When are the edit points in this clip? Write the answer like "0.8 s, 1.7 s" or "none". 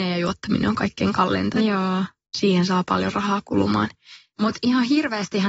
4.3 s